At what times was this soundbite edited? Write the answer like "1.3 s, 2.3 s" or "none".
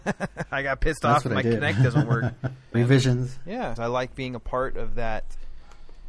2.7 s, 3.7 s